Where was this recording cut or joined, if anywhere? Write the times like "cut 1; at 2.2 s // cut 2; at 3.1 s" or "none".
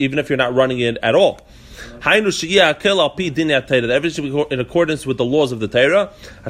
cut 1; at 2.0 s